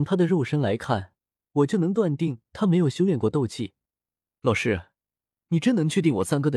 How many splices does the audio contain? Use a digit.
1